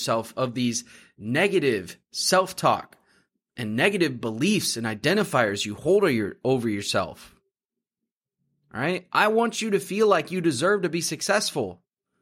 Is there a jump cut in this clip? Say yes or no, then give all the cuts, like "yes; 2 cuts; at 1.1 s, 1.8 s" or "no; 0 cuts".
no; 0 cuts